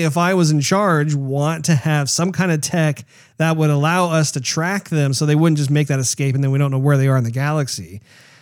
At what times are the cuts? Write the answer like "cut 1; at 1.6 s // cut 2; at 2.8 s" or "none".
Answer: none